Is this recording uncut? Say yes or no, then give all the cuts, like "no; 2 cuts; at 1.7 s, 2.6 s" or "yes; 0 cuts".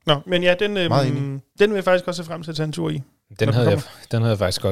yes; 0 cuts